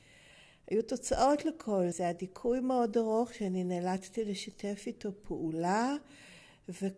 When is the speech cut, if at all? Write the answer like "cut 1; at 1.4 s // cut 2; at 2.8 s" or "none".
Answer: cut 1; at 1.9 s